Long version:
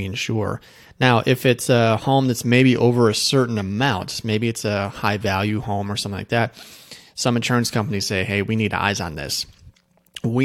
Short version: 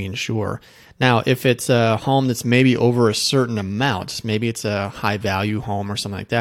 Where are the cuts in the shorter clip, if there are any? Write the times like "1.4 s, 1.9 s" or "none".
none